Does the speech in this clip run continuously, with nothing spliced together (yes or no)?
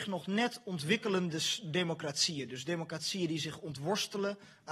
yes